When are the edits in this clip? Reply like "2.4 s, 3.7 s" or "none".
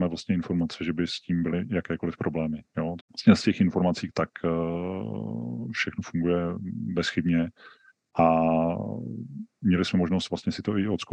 3.0 s, 4.1 s

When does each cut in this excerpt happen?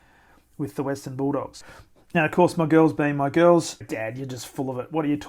3.8 s

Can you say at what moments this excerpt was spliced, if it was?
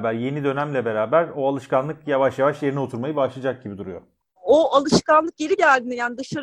4.4 s

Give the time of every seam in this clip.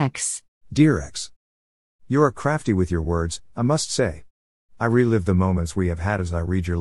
2.3 s

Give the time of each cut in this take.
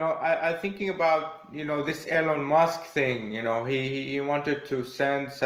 none

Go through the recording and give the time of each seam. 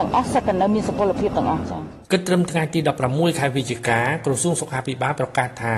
2.0 s

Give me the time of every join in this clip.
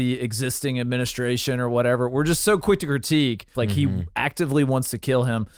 3.5 s

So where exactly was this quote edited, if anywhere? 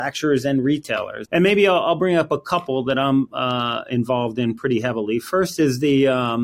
1.2 s

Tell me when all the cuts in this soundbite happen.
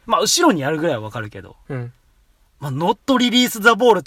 none

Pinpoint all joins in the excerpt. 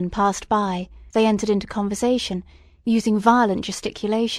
1.1 s

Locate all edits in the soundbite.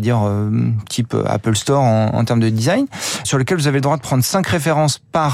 3.2 s

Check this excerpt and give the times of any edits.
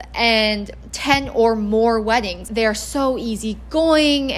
2.5 s

